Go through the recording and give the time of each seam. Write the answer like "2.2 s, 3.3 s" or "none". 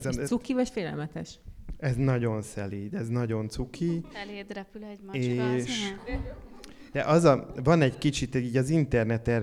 none